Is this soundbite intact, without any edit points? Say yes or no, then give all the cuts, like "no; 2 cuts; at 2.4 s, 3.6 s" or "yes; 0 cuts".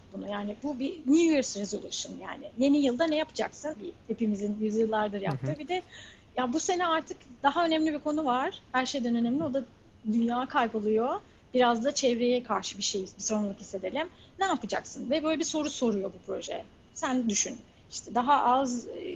no; 1 cut; at 3.8 s